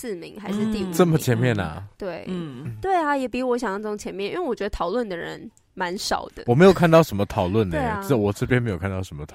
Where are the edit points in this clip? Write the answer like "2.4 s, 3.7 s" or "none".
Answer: none